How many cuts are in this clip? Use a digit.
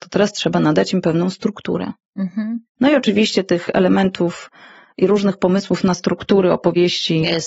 1